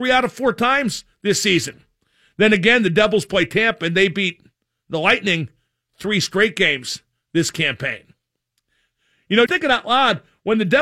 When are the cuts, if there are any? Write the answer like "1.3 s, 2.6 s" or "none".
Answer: 9.5 s